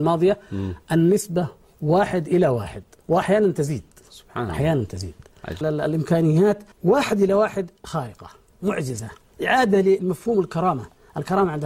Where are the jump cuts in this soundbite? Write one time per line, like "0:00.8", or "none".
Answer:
0:05.6
0:06.7